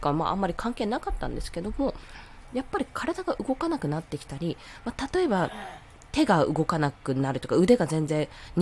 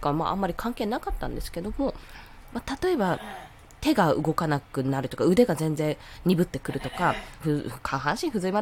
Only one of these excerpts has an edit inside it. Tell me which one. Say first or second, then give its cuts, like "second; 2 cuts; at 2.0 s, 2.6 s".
second; 2 cuts; at 2.5 s, 7.4 s